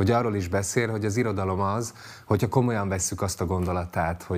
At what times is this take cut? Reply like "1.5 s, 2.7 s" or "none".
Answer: none